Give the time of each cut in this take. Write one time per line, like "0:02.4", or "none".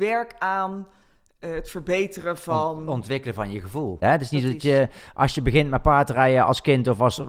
0:04.0